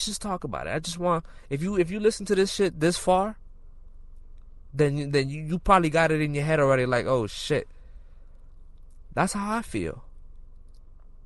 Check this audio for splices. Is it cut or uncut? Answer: uncut